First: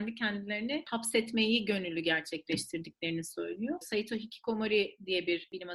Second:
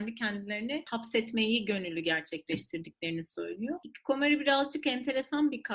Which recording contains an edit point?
first; 1 cut; at 3.8 s

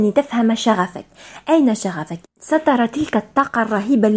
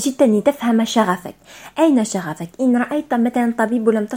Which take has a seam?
first; 1 cut; at 2.2 s

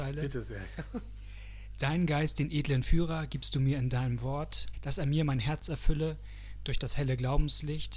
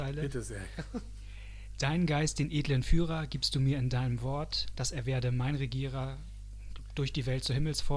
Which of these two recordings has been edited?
first; 1 cut; at 4.7 s

